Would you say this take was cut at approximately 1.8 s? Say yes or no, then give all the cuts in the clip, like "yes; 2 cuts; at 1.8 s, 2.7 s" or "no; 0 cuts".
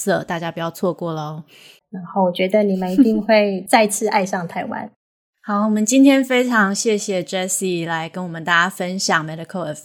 yes; 1 cut; at 1.8 s